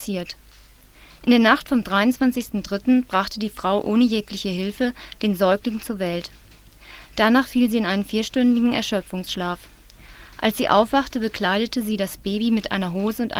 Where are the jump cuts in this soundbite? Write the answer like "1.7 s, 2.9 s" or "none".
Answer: none